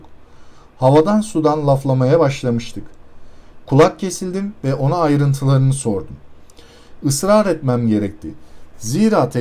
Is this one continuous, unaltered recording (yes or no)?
no